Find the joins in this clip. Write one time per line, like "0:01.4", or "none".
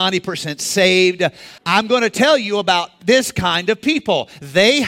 0:01.6